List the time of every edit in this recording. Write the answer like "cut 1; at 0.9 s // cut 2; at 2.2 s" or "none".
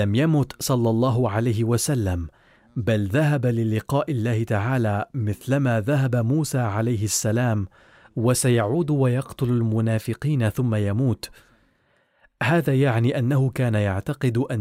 none

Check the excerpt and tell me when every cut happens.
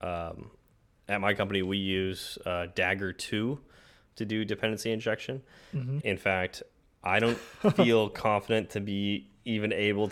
cut 1; at 6.0 s

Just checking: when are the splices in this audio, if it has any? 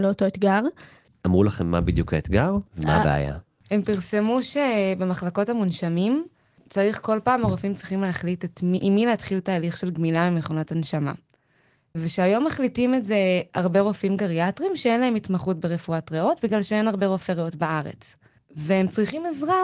cut 1; at 2.6 s

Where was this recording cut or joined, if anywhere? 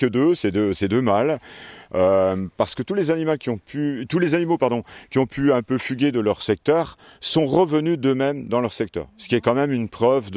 cut 1; at 1.9 s

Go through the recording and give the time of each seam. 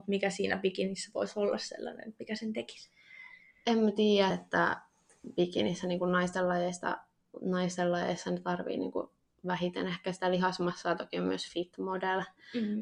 cut 1; at 4.3 s

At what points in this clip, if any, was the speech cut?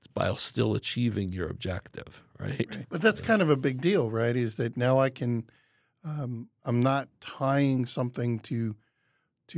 cut 1; at 2.8 s // cut 2; at 6.6 s

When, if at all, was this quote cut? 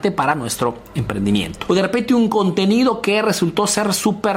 cut 1; at 1.7 s

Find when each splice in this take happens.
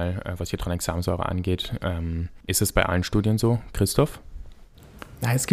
cut 1; at 2.4 s

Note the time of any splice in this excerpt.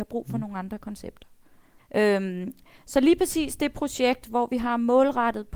cut 1; at 1.8 s

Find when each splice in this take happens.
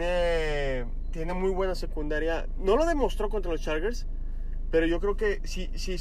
none

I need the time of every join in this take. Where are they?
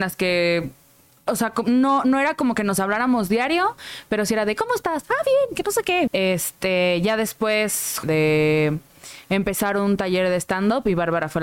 cut 1; at 6.1 s // cut 2; at 8.0 s

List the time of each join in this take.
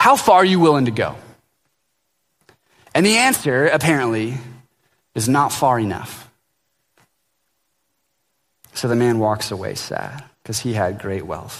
none

